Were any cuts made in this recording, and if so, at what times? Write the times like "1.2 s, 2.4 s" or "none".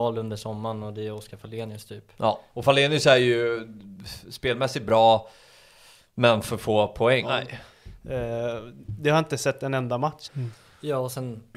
2.5 s, 7.2 s, 10.2 s